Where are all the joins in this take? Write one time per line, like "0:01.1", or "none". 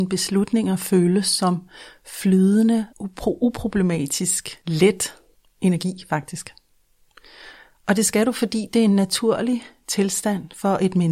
0:02.9